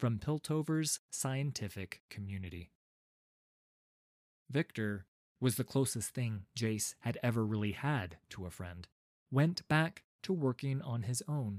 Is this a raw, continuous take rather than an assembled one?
no; 1 cut; at 9.2 s

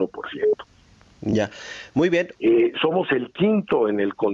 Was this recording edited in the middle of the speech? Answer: yes; 1 cut; at 2.3 s

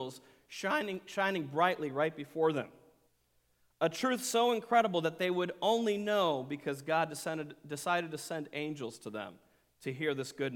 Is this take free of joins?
yes; 0 cuts

